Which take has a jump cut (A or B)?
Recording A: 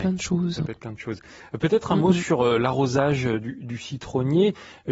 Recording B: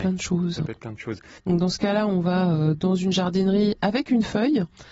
B